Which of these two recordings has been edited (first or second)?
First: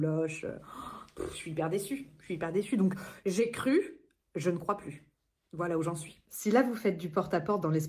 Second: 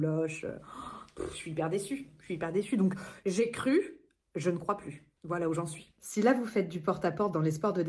second